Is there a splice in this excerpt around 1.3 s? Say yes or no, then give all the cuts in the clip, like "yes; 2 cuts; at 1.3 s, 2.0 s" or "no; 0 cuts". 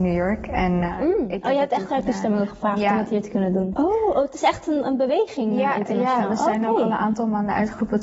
no; 1 cut; at 3.7 s